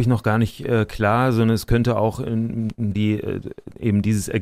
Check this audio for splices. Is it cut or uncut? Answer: cut